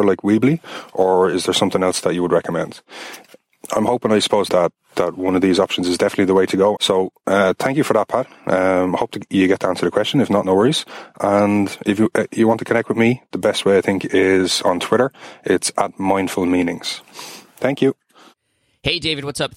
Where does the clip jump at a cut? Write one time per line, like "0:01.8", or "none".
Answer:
0:04.5
0:06.8